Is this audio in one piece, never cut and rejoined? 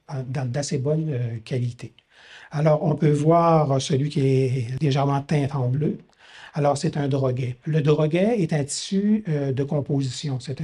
no; 1 cut; at 7.6 s

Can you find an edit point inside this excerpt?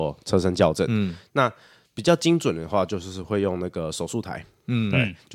no; 0 cuts

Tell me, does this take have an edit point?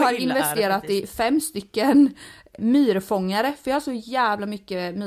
yes; 1 cut; at 2.6 s

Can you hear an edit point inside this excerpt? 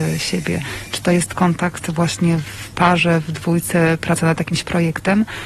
no; 0 cuts

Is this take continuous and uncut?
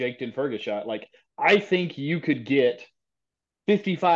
yes; 0 cuts

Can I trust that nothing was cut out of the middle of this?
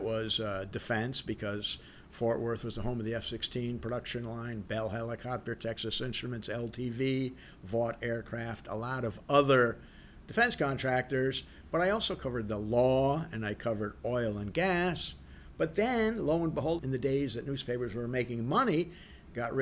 no; 1 cut; at 16.8 s

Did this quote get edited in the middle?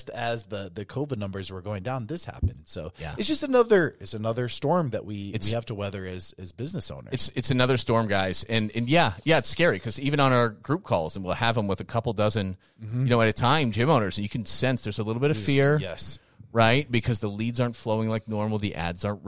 no; 0 cuts

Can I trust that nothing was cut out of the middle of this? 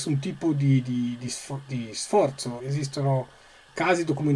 no; 1 cut; at 2.6 s

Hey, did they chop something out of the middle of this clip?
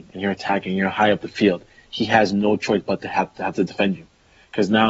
no; 0 cuts

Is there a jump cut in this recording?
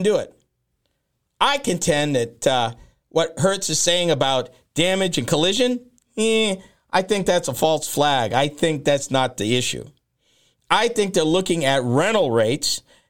no; 0 cuts

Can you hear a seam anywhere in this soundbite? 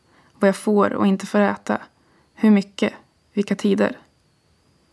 no; 0 cuts

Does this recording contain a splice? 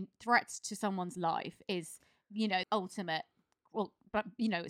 yes; 1 cut; at 2.6 s

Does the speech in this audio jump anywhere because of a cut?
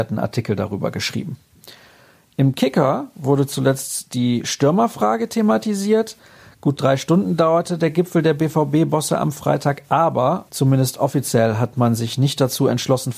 yes; 1 cut; at 10.5 s

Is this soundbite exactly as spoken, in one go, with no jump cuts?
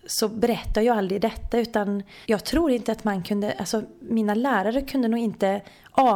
no; 1 cut; at 2.2 s

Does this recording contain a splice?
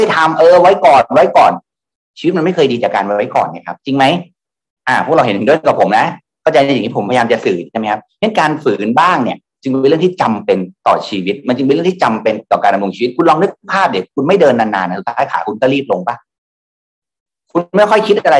yes; 2 cuts; at 3.8 s, 10.8 s

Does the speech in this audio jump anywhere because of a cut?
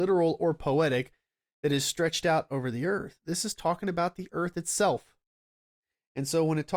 no; 0 cuts

